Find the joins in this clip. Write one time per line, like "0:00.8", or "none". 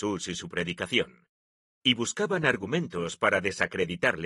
0:01.7